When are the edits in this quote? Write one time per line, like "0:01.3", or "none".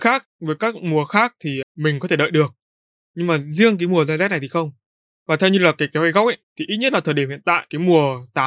0:01.6
0:05.1

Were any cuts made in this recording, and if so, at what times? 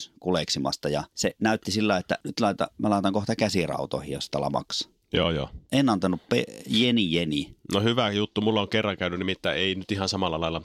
none

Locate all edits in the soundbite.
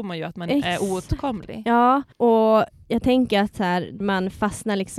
0:02.1
0:04.0

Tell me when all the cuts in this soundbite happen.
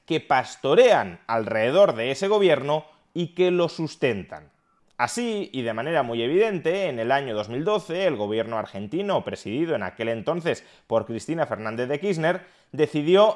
none

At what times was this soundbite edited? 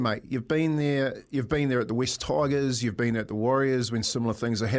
none

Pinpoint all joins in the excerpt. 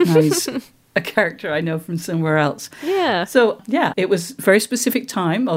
0:03.9

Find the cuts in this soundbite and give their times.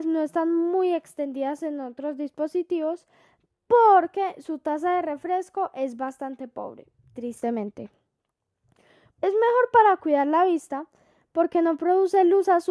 0:09.1

